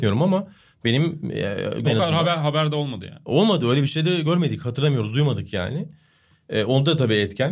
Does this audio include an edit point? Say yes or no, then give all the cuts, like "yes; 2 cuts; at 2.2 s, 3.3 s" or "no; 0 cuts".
yes; 1 cut; at 1.8 s